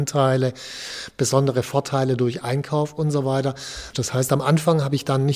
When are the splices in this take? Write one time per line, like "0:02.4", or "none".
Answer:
0:03.9